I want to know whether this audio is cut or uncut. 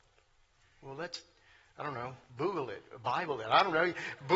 uncut